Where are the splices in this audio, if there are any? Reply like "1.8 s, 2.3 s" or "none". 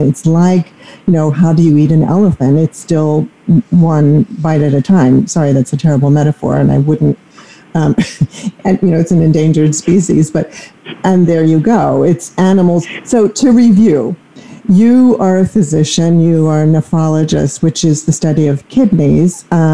none